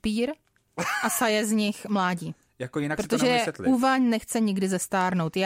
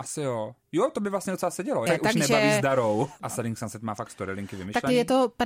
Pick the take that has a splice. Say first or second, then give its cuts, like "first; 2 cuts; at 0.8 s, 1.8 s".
second; 2 cuts; at 1.9 s, 3.2 s